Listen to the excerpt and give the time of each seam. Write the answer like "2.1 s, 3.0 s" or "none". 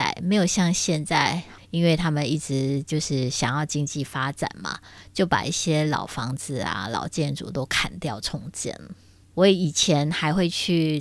1.6 s, 9.2 s